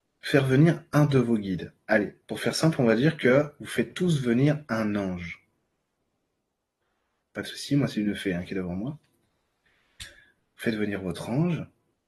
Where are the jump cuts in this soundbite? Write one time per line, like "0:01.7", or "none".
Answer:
0:07.2